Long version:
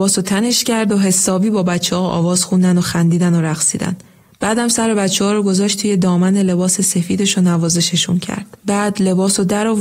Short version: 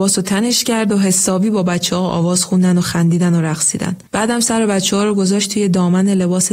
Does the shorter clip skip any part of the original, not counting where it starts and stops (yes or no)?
yes